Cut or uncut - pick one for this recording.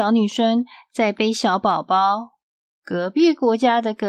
cut